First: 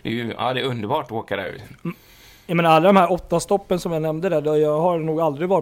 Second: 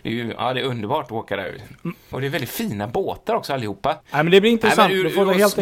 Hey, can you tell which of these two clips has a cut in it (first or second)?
second